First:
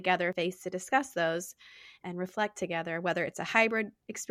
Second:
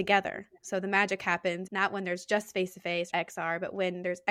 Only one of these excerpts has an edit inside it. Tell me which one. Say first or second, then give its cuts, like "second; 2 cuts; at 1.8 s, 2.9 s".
second; 2 cuts; at 1.7 s, 3.1 s